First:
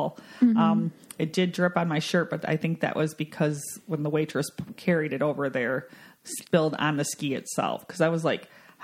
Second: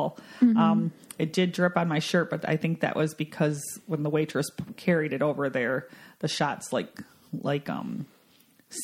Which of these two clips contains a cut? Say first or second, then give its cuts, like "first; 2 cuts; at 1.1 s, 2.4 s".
first; 1 cut; at 6.2 s